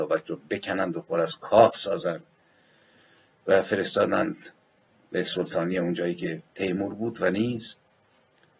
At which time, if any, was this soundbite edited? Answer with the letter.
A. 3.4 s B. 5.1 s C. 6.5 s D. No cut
C